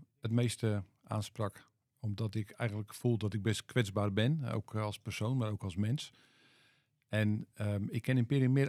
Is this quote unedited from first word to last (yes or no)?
yes